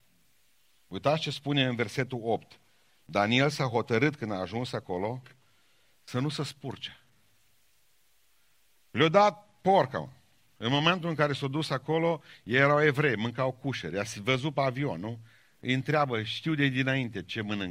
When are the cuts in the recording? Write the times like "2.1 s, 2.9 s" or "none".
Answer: none